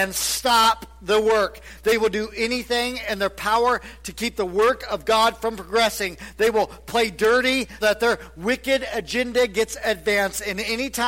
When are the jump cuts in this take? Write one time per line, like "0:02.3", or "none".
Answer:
0:07.8